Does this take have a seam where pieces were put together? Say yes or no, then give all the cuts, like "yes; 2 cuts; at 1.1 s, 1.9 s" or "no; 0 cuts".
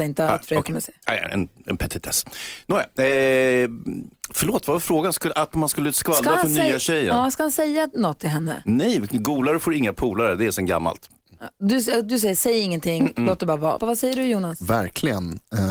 yes; 1 cut; at 13.8 s